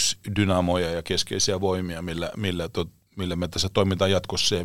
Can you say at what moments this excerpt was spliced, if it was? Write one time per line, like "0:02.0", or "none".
none